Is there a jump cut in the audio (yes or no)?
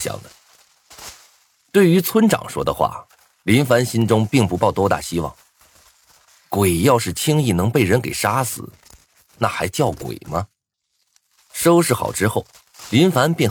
no